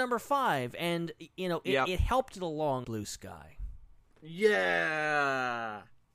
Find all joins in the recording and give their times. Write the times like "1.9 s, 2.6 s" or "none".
2.8 s